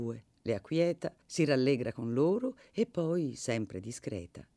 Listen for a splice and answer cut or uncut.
cut